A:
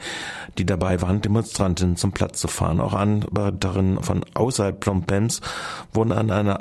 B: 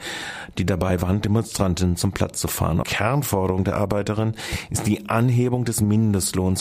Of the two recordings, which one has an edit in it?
B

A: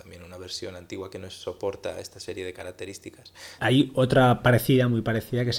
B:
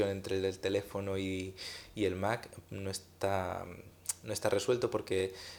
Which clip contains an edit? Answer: A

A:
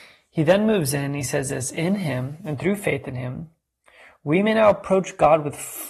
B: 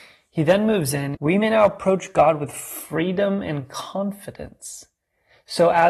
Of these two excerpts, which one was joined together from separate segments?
B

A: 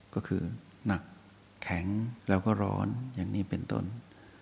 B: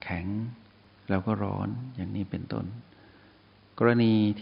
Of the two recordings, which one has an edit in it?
A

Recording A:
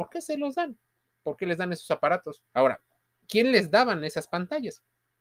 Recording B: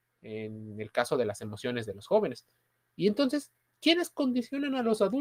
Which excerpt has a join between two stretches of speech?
A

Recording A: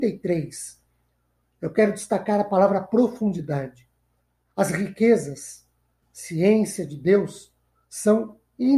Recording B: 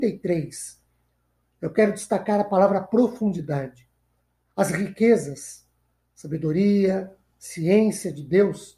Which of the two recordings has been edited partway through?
A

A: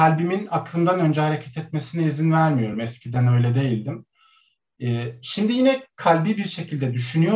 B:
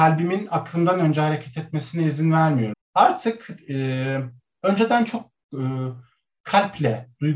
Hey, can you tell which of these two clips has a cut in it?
B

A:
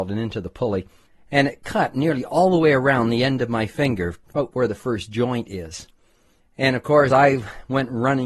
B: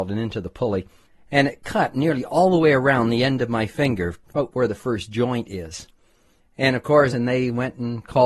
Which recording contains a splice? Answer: B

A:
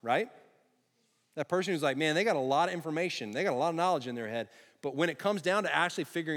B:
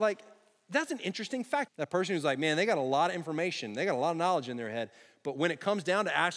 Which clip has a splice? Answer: B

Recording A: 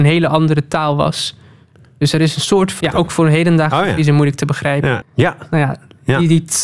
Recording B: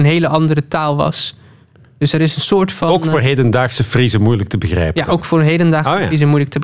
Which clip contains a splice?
A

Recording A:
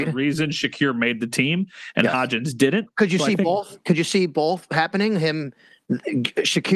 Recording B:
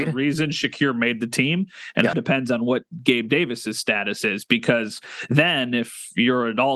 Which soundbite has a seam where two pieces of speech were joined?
B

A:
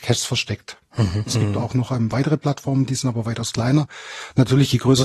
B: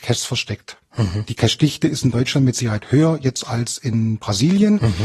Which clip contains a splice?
A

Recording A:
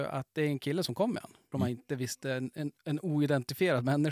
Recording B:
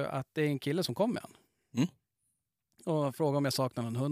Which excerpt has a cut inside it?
A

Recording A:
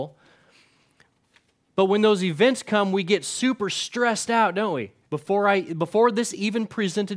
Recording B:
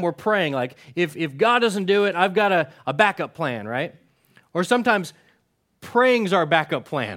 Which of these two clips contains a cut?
A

